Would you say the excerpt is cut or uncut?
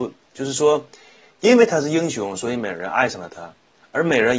uncut